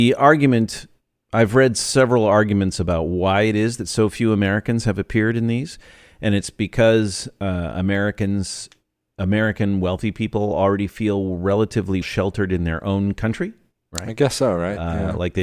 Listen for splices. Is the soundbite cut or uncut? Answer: cut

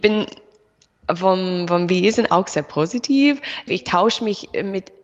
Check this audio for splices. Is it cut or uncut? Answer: cut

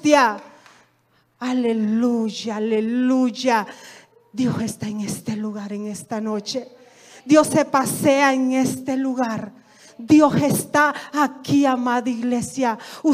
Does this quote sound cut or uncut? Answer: uncut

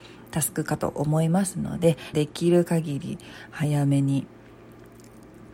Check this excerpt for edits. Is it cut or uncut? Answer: cut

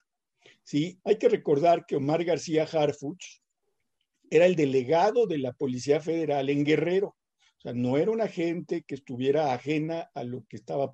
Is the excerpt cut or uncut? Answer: cut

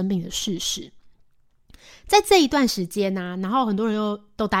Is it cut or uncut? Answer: uncut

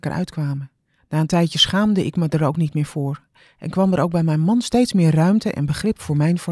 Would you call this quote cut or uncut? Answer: cut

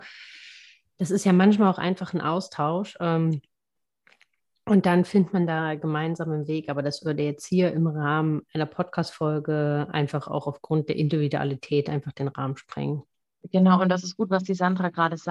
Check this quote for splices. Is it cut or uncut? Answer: uncut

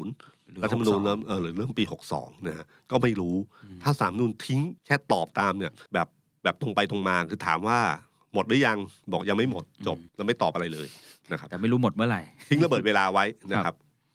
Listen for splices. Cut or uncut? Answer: cut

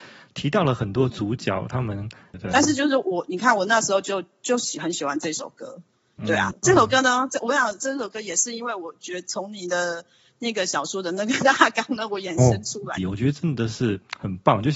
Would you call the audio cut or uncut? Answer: cut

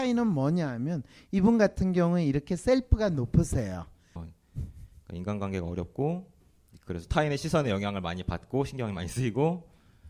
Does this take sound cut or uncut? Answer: cut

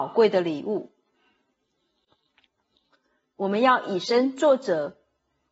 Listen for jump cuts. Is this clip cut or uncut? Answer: cut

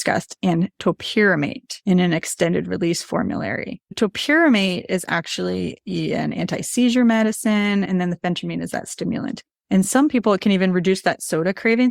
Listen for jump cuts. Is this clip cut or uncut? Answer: cut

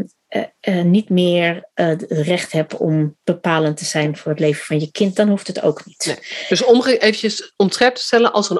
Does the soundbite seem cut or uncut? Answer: uncut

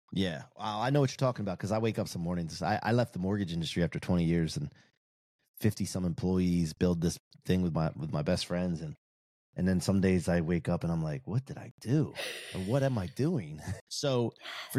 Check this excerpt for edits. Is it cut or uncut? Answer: cut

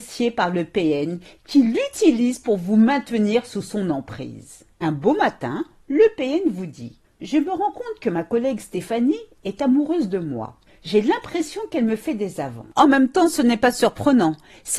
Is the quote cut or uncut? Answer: uncut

